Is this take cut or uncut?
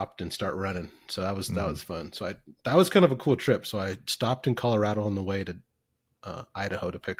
uncut